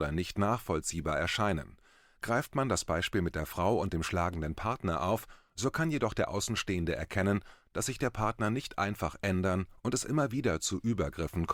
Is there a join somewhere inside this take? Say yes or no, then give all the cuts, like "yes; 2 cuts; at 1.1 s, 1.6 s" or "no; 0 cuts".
no; 0 cuts